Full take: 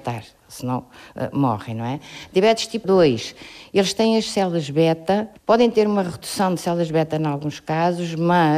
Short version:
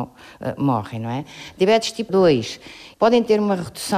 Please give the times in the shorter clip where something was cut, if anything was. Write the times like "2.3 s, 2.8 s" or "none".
2.9 s